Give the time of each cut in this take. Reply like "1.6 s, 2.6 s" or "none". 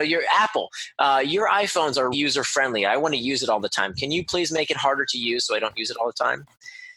2.1 s

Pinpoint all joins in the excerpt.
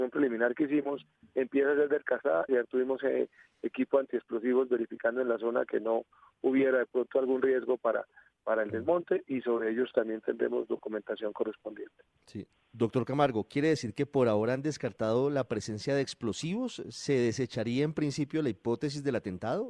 2.5 s

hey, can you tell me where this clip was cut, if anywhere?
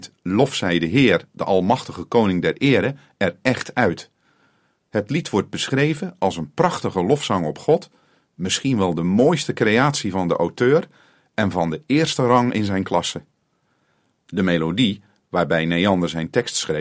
none

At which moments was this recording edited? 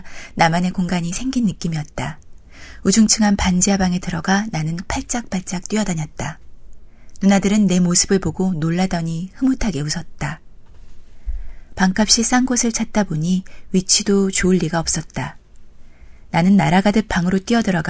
16.3 s

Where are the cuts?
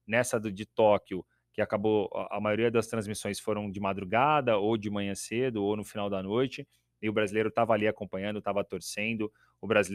none

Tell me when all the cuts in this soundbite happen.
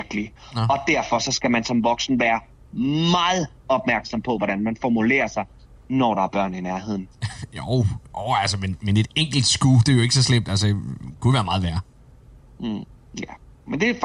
none

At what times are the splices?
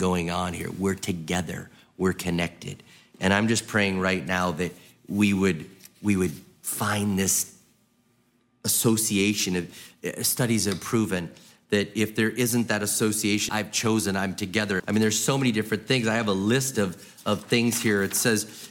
13.5 s, 14.8 s

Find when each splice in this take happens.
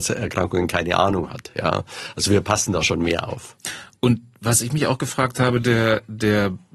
none

